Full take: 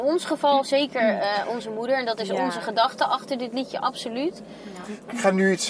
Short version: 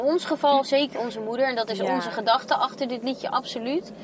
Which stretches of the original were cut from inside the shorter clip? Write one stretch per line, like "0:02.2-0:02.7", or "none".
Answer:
0:00.9-0:01.4

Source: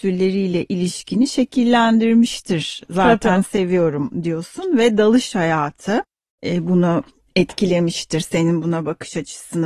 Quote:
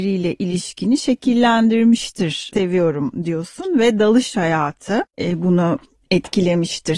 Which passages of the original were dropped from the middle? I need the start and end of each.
0:02.8-0:03.5
0:06.1-0:06.4

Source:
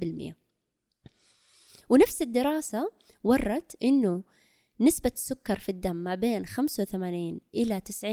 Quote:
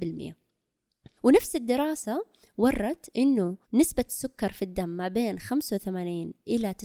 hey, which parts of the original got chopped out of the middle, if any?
0:01.2-0:01.8
0:04.3-0:04.7

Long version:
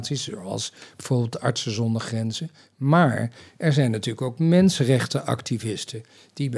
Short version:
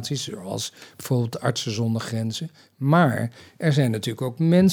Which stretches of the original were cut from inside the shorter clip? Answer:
none

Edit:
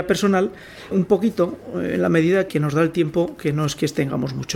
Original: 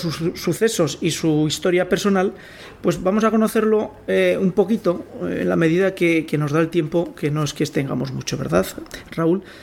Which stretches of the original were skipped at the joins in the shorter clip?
0:02.7-0:04.4
0:06.0-0:06.3

